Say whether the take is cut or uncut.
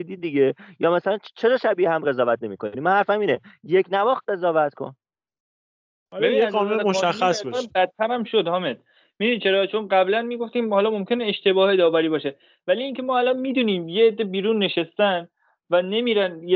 uncut